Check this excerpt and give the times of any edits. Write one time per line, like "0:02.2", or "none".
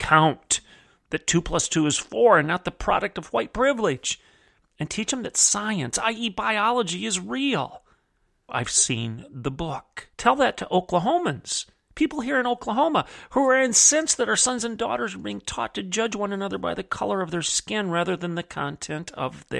0:08.5
0:10.1